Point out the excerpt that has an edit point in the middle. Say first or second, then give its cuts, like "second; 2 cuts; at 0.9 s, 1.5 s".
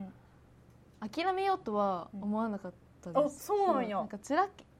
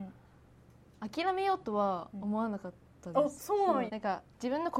second; 1 cut; at 3.9 s